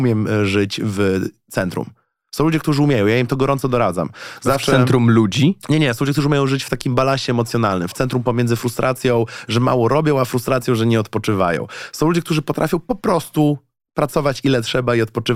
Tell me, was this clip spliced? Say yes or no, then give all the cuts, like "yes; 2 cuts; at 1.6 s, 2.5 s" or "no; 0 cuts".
no; 0 cuts